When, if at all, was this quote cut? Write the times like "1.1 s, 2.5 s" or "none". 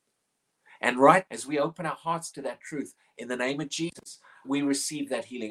1.3 s, 4.4 s